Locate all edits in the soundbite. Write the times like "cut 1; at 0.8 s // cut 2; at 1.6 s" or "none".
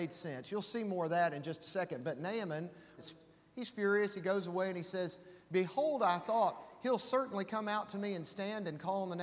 cut 1; at 3.0 s